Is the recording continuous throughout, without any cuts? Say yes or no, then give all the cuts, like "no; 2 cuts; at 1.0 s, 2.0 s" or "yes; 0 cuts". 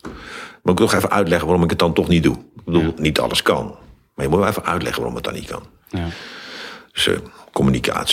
yes; 0 cuts